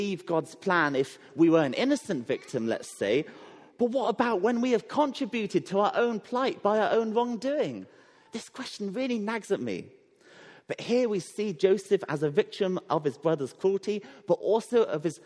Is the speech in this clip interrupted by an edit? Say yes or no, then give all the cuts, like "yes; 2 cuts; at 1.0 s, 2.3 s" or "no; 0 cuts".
no; 0 cuts